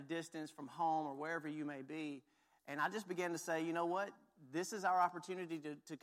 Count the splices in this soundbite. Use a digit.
0